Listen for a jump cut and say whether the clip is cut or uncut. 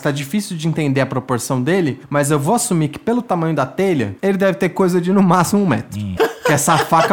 cut